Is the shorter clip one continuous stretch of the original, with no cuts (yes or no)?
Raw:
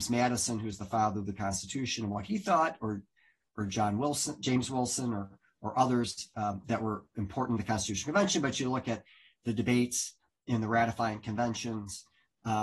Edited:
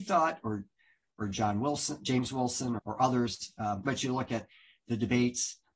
no